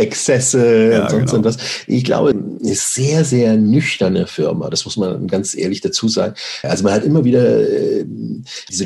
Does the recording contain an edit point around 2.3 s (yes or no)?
yes